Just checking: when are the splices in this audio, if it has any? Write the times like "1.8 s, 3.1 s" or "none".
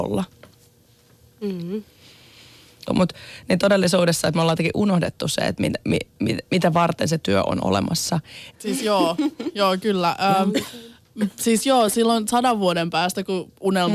2.9 s, 8.5 s